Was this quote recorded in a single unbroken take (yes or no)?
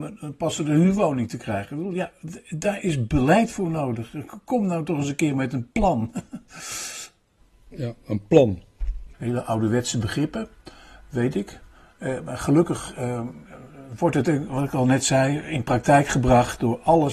no